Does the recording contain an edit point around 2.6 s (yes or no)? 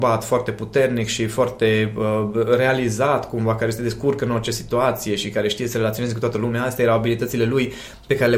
no